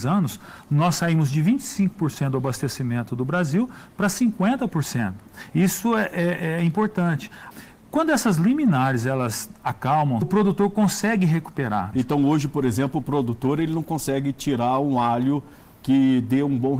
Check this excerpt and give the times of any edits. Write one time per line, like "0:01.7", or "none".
0:07.5
0:10.2
0:11.9

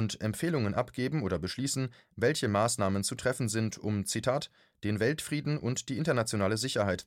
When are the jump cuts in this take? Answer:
none

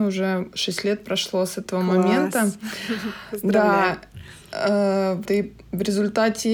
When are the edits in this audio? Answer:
0:05.2

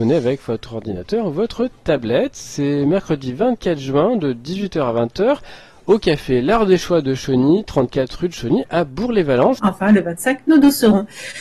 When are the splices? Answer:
0:09.6

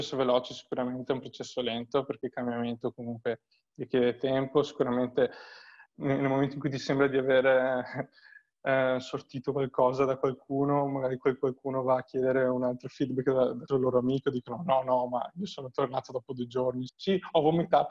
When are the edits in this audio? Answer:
0:13.7
0:16.9

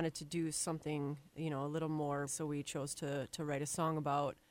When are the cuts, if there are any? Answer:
0:02.3

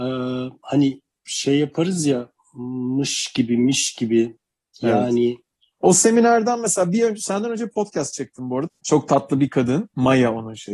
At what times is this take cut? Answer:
0:05.8
0:08.7

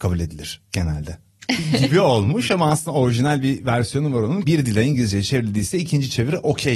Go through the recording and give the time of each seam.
0:01.4
0:04.4

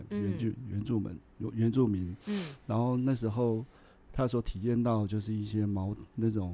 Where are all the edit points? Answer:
none

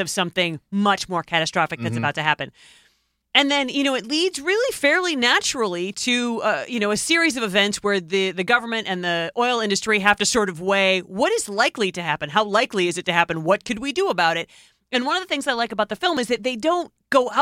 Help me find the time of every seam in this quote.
none

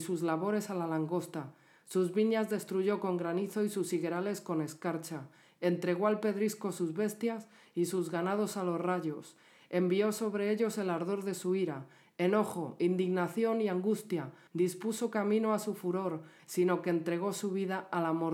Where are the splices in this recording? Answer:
0:14.5
0:16.4

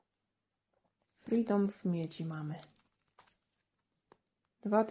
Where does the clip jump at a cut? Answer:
0:01.0

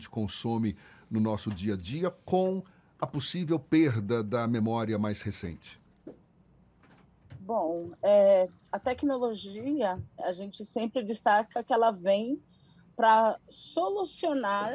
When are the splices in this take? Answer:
0:10.2

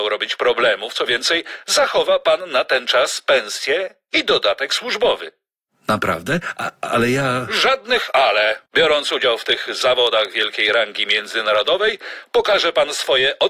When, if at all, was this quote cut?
0:08.7

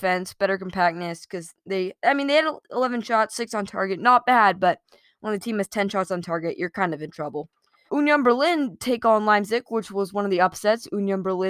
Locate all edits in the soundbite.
0:07.9

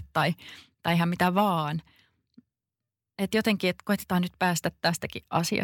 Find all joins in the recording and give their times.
none

